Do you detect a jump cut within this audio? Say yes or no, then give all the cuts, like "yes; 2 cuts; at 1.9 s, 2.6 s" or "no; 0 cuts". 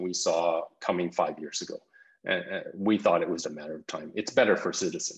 yes; 1 cut; at 3.4 s